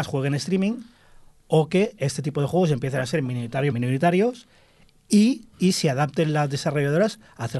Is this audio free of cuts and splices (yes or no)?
no